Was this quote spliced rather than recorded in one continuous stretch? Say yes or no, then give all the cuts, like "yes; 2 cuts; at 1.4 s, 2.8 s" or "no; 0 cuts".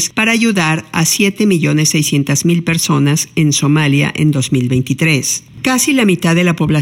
no; 0 cuts